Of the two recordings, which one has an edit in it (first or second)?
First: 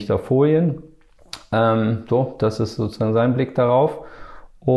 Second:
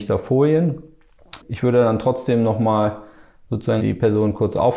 second